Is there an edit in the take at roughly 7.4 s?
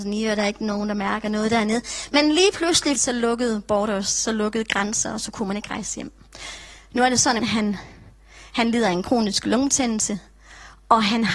yes; 2 cuts; at 3.0 s, 7.4 s

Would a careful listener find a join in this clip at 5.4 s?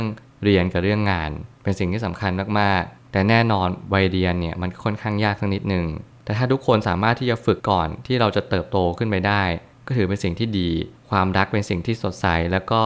no; 1 cut; at 7.6 s

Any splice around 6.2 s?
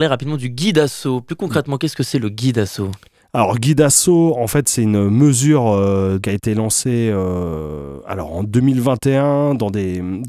yes; 1 cut; at 6.2 s

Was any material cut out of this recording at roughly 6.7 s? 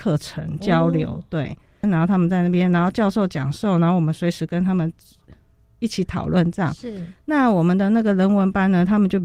no; 1 cut; at 1.8 s

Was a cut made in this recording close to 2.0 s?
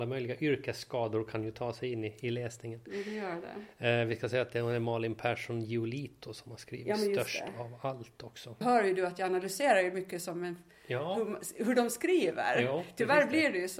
no; 1 cut; at 8.6 s

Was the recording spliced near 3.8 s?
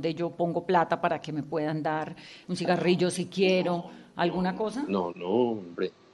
no; 1 cut; at 5.1 s

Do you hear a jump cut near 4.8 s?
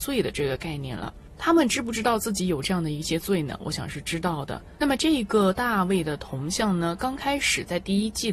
yes; 1 cut; at 4.8 s

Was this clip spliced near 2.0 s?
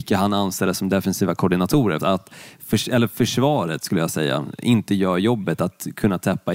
yes; 1 cut; at 2.0 s

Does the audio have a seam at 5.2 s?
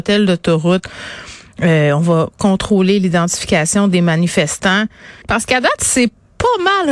yes; 1 cut; at 5.2 s

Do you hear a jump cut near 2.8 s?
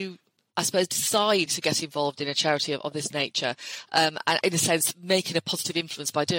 no; 2 cuts; at 1.5 s, 4.4 s

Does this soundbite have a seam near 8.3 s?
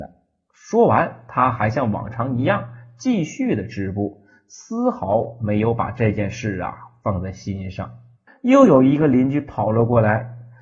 yes; 1 cut; at 8.3 s

